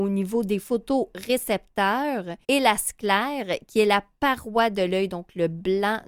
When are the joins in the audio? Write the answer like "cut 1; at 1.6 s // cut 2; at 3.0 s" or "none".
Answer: cut 1; at 2.4 s